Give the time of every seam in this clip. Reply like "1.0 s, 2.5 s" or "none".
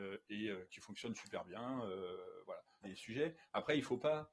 2.8 s